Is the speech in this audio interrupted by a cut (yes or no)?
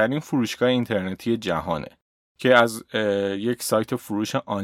no